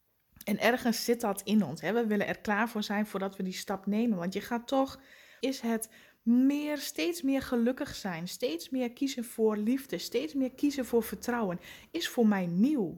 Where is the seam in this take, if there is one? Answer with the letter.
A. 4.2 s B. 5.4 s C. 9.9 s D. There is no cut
B